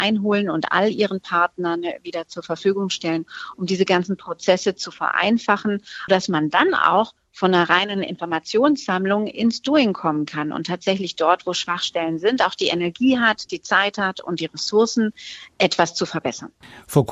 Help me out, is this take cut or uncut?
cut